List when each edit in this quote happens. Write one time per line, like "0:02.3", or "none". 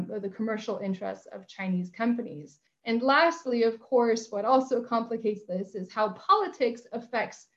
0:02.7